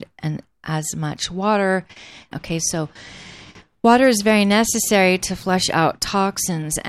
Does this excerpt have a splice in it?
yes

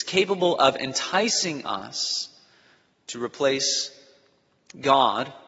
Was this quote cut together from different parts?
no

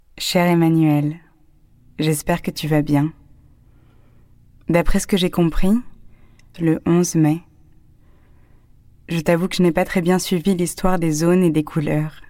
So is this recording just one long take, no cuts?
no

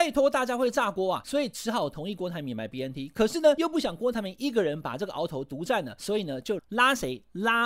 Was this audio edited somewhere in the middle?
yes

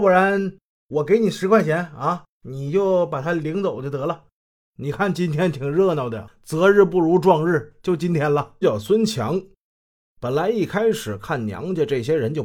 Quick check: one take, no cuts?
no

